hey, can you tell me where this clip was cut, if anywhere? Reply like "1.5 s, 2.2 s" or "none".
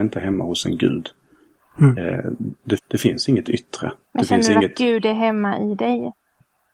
2.8 s, 4.0 s